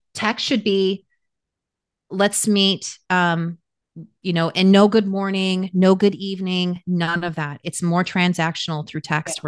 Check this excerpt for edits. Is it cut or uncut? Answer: uncut